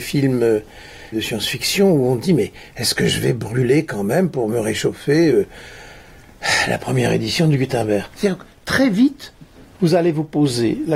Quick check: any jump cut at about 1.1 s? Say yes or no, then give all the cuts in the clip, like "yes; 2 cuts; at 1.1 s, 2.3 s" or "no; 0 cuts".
yes; 1 cut; at 1.1 s